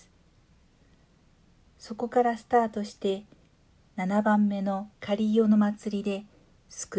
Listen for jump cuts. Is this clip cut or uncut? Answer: cut